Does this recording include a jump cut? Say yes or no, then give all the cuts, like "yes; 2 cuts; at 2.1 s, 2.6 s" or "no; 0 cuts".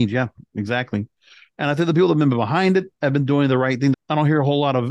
yes; 2 cuts; at 1.5 s, 3.9 s